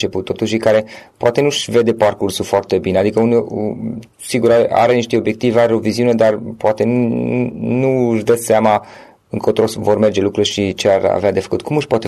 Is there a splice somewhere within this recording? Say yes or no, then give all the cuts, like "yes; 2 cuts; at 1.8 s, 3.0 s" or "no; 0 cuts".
no; 0 cuts